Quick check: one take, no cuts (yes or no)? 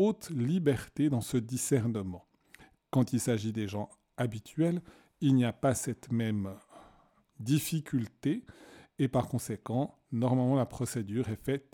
yes